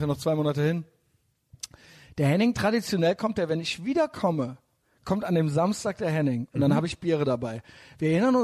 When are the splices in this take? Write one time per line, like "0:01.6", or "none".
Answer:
none